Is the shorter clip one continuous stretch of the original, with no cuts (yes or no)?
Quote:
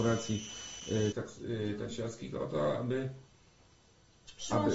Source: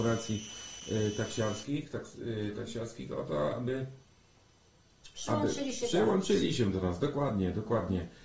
no